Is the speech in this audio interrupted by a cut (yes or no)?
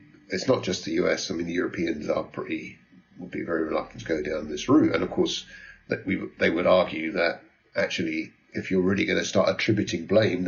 no